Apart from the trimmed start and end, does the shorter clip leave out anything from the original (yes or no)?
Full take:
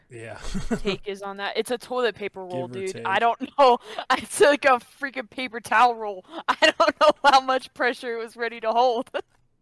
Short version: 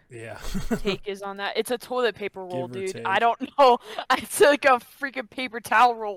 no